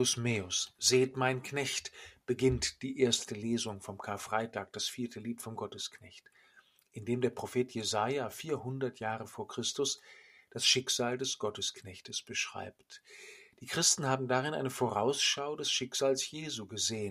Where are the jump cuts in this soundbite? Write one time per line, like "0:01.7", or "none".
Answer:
none